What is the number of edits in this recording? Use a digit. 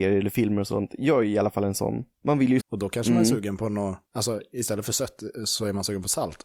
2